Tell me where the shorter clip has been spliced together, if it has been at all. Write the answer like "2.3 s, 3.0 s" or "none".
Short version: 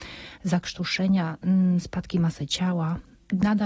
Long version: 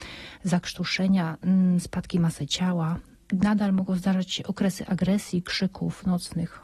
none